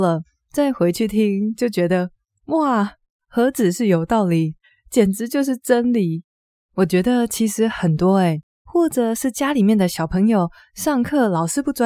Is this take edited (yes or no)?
yes